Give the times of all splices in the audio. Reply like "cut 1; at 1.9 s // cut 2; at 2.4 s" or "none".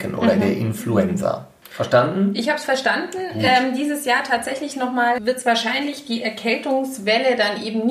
cut 1; at 1.6 s // cut 2; at 5.2 s

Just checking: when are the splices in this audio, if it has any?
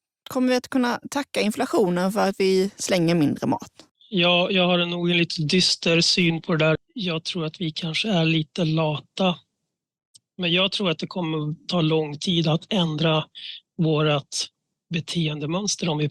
cut 1; at 6.8 s

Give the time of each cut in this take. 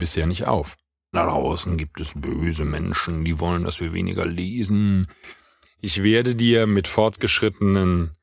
cut 1; at 1.1 s // cut 2; at 5.6 s

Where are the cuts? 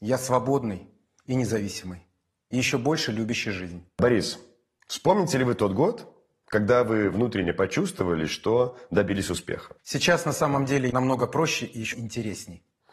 cut 1; at 9.8 s // cut 2; at 10.9 s // cut 3; at 11.9 s

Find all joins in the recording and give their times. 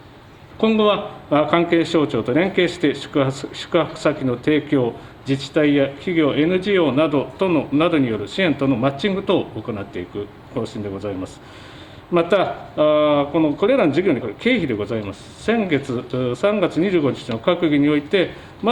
cut 1; at 14.2 s

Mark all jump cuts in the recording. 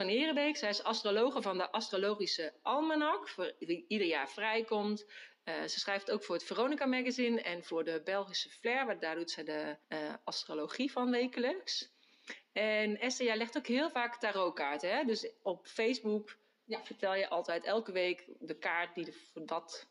cut 1; at 9.8 s

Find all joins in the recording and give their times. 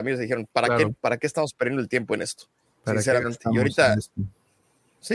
none

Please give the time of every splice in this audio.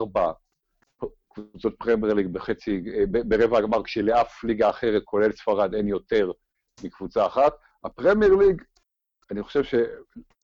none

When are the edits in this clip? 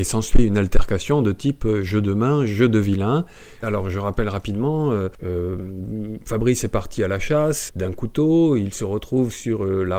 cut 1; at 3.6 s // cut 2; at 7.7 s

